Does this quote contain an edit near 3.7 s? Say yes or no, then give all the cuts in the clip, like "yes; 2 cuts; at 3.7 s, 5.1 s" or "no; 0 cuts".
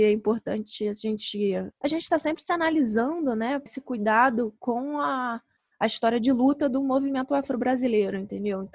yes; 1 cut; at 3.7 s